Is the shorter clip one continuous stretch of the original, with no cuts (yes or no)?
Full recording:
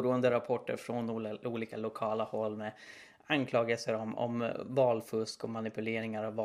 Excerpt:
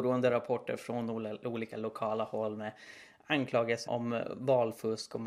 no